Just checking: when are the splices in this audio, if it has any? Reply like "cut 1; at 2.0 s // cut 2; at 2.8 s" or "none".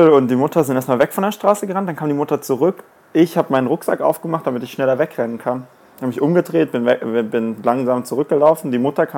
none